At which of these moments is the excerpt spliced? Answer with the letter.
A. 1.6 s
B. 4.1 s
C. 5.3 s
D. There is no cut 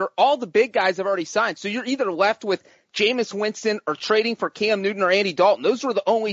D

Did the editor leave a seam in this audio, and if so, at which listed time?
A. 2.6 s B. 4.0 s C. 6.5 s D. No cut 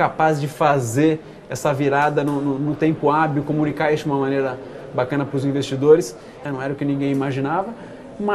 C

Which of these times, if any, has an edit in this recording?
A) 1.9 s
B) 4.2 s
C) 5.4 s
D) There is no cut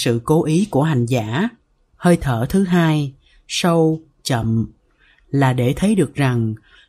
A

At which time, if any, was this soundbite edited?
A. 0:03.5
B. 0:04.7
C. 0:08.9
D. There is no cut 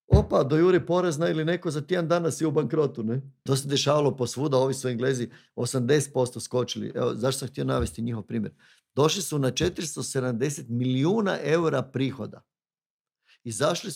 A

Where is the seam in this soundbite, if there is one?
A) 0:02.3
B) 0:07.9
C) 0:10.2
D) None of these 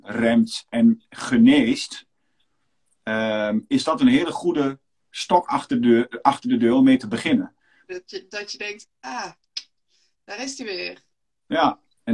B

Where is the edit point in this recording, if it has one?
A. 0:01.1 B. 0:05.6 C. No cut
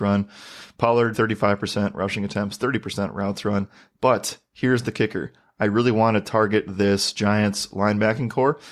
A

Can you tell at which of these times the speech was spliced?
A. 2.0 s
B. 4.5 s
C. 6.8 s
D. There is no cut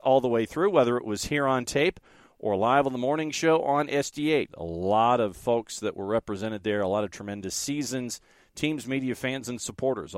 B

